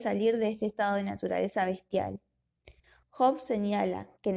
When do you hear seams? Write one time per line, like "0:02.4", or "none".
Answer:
none